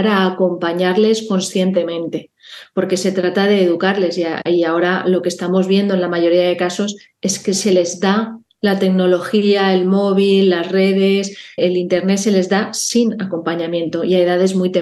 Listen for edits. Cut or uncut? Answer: cut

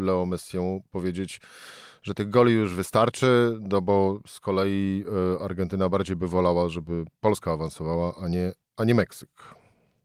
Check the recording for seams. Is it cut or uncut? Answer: uncut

